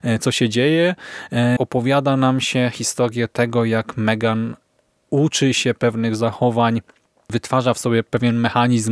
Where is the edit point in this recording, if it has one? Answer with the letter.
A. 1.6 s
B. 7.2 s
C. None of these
A